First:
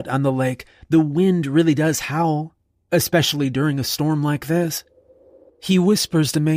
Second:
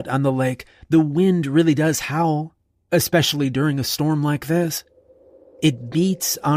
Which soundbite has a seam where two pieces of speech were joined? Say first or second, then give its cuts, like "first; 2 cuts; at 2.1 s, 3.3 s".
first; 1 cut; at 5.5 s